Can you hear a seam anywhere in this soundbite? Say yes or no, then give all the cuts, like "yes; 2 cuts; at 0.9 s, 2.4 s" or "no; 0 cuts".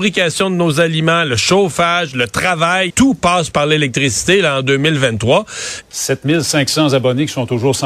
yes; 2 cuts; at 2.9 s, 5.8 s